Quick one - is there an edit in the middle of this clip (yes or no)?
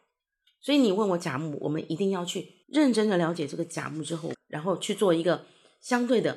yes